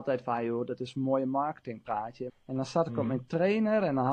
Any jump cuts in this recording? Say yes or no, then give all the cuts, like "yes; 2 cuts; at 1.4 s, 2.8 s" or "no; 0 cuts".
yes; 1 cut; at 2.3 s